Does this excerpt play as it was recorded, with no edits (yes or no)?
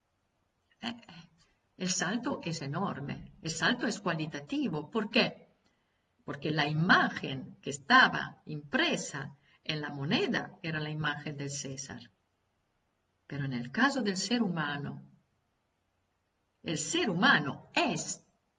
yes